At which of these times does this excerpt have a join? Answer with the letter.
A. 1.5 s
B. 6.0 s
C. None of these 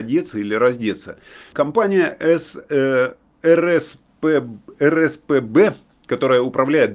A